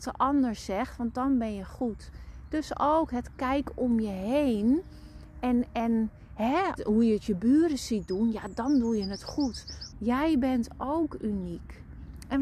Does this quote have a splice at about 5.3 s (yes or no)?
no